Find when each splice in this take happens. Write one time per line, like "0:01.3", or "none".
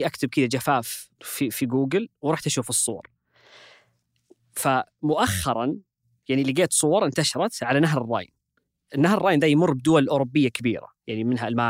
0:01.1